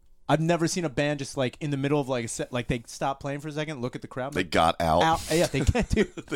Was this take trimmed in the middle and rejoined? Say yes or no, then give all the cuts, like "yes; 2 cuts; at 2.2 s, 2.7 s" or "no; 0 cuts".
no; 0 cuts